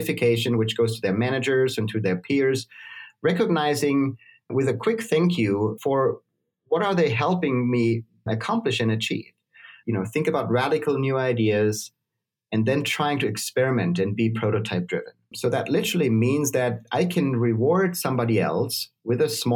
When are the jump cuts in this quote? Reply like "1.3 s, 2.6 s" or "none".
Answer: 9.8 s, 15.3 s